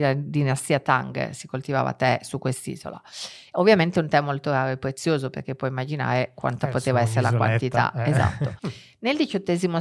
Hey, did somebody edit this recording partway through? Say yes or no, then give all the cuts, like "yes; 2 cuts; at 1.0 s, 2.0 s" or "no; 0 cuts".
yes; 1 cut; at 8.6 s